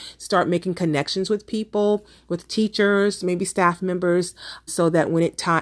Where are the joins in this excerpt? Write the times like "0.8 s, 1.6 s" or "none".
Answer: 4.7 s